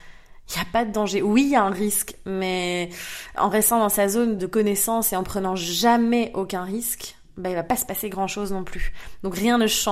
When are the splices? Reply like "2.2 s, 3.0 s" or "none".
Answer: 3.4 s, 4.4 s

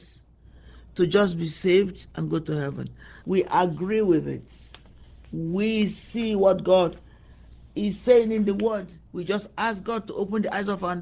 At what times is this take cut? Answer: 3.2 s, 9.1 s

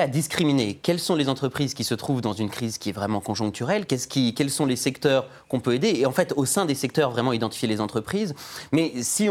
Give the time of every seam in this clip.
none

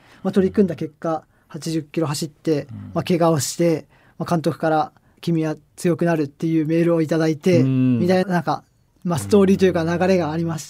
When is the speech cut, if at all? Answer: 8.2 s

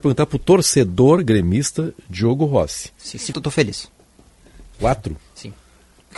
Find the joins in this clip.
3.3 s

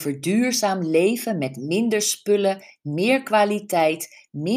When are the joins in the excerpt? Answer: none

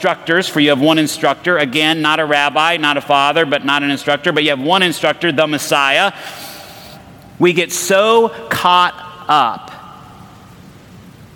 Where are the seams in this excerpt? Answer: 7.4 s

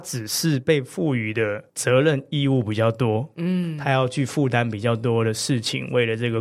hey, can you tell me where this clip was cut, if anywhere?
1.7 s

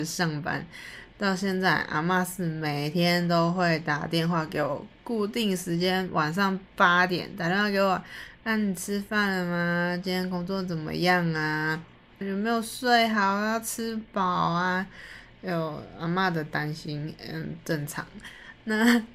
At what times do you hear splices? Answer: 12.2 s

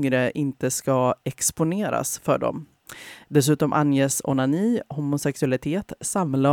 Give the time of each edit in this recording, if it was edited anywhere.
3.3 s

